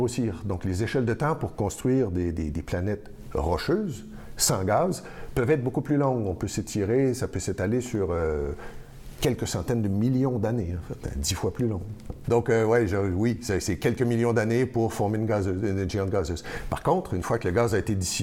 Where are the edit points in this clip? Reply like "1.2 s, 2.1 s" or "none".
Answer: 12.2 s